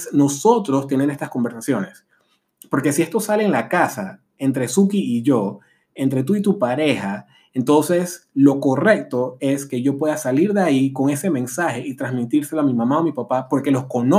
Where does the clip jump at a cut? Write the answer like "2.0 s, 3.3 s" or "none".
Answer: none